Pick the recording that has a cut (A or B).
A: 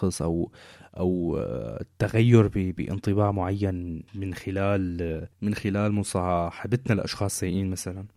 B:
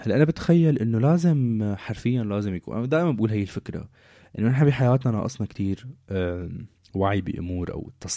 A